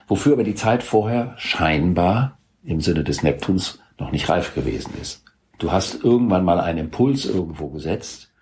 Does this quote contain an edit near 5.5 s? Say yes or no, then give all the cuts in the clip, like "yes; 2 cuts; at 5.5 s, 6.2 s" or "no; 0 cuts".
yes; 1 cut; at 5.5 s